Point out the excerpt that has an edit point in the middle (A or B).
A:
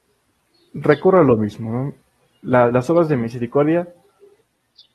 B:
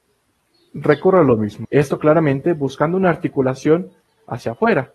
B